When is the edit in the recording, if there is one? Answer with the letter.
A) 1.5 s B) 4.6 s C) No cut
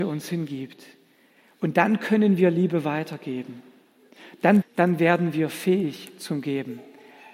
B